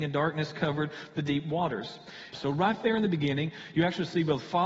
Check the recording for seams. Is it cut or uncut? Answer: cut